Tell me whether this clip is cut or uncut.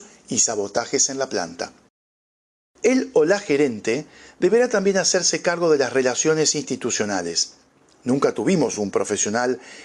uncut